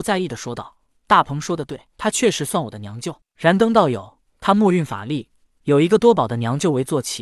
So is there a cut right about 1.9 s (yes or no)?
yes